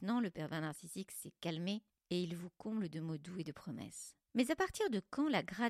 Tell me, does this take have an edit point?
yes; 1 cut; at 4.3 s

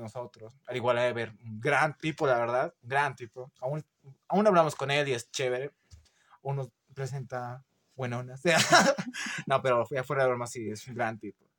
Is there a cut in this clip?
no; 0 cuts

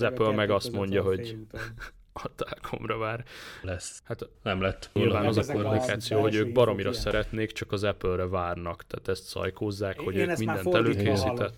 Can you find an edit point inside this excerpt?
yes; 2 cuts; at 3.6 s, 5.0 s

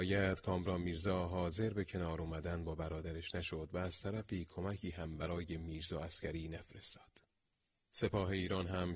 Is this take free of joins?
yes; 0 cuts

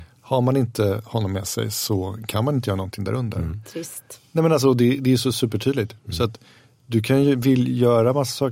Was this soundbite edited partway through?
no; 0 cuts

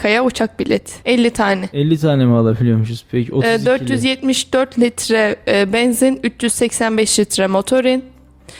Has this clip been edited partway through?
yes; 1 cut; at 1.0 s

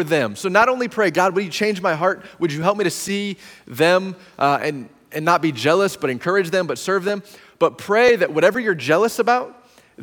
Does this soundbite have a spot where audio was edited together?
no; 0 cuts

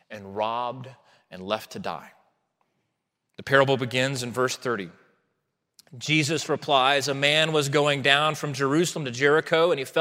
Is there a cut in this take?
no; 0 cuts

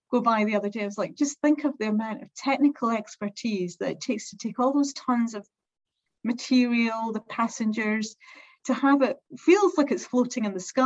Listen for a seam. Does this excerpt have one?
yes; 1 cut; at 9.3 s

